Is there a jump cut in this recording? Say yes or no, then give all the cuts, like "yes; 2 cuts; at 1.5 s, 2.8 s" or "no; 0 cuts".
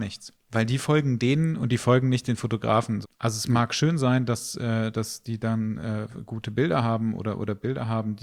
yes; 1 cut; at 3.0 s